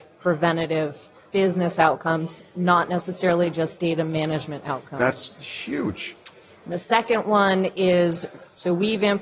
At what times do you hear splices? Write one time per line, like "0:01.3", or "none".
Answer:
none